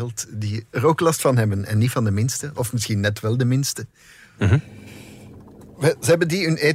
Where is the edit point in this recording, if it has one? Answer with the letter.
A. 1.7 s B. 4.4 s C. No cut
B